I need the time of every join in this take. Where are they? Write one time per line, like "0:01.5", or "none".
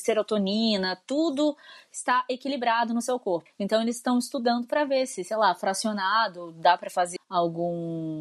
0:03.5
0:07.2